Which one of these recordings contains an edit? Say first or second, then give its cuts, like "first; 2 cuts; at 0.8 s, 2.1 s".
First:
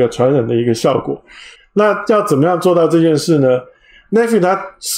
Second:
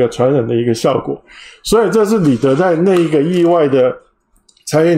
first; 1 cut; at 1.6 s